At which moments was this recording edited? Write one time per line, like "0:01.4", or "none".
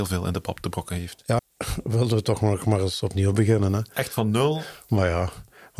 0:01.4